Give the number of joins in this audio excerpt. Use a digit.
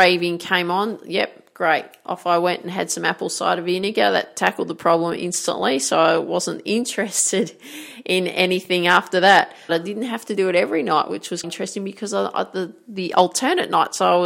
2